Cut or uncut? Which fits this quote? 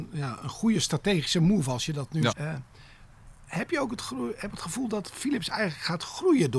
cut